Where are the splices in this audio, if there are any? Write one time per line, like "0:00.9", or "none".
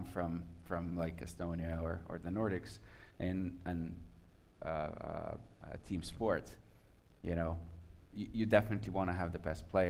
0:04.6
0:08.1